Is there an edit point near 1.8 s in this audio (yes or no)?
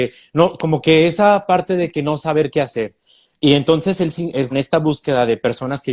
no